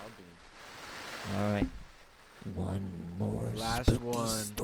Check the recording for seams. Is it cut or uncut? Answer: uncut